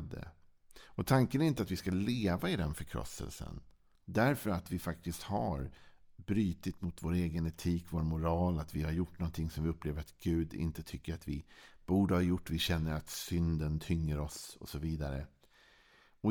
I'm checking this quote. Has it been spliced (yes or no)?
yes